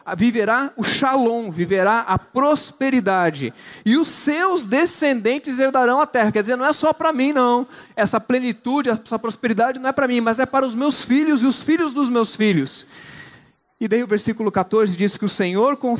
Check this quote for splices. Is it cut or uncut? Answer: uncut